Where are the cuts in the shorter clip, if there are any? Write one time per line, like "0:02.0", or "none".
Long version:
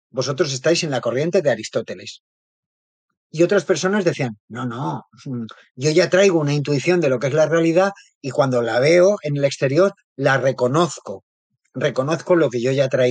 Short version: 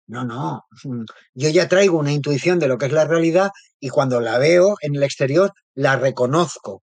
none